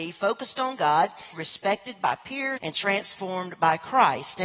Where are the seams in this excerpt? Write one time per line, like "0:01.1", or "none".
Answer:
0:01.3
0:02.6